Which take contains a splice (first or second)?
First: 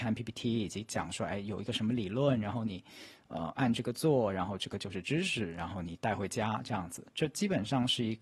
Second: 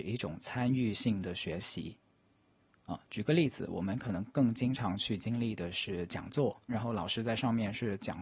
second